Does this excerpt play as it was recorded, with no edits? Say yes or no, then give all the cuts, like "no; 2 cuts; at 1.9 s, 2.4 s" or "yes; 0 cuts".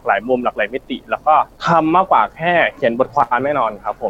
no; 1 cut; at 1.5 s